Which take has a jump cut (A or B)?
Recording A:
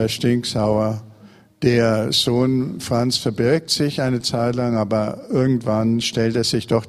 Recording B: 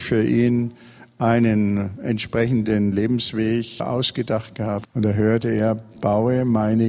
B